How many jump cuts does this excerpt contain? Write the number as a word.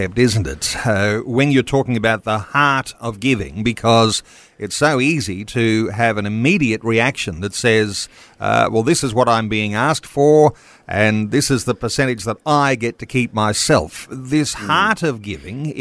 zero